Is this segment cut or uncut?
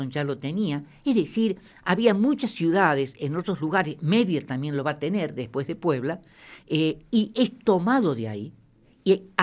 uncut